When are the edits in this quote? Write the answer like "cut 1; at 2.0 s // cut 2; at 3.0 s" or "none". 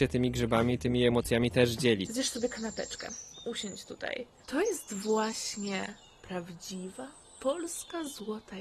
cut 1; at 2.1 s // cut 2; at 4.4 s